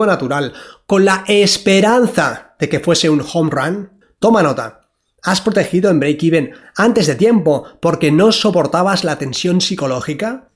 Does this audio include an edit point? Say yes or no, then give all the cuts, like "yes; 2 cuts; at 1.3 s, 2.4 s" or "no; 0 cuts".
no; 0 cuts